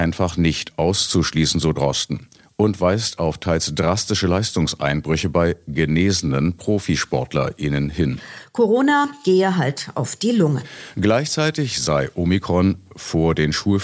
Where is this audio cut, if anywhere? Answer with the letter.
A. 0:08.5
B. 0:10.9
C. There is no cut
B